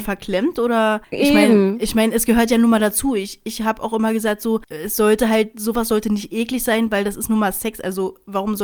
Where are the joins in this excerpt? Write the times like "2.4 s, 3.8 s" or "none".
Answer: none